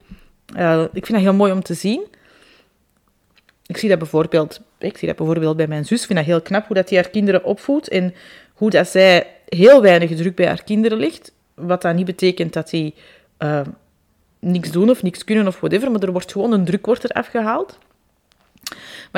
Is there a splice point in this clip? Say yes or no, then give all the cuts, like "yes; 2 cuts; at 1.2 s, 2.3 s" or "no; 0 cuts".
no; 0 cuts